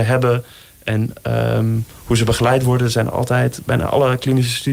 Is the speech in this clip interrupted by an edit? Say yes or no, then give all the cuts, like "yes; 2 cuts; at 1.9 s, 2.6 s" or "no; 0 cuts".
no; 0 cuts